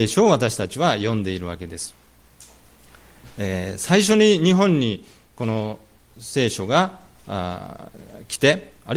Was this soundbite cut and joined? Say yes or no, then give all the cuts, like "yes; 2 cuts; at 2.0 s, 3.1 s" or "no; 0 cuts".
no; 0 cuts